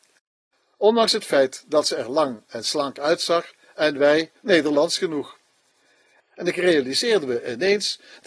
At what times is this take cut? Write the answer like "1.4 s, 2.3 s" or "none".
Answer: 6.2 s